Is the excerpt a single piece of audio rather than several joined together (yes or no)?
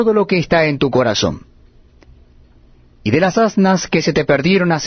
yes